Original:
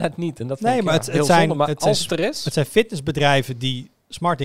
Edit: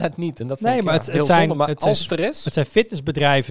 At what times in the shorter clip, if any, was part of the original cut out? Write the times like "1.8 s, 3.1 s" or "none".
none